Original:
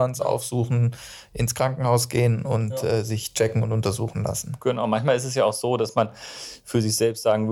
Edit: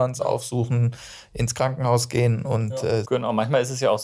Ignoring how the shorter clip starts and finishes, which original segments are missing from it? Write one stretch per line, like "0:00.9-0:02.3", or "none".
0:03.0-0:04.6